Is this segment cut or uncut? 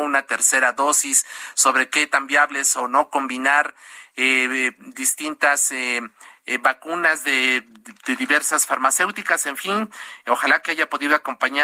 uncut